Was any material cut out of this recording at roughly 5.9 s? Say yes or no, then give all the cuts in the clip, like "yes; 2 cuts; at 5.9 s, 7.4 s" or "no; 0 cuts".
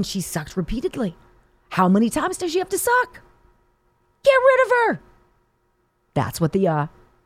no; 0 cuts